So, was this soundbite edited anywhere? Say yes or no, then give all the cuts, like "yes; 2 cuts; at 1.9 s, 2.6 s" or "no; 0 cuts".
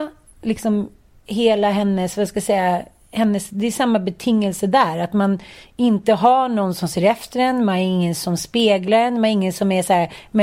no; 0 cuts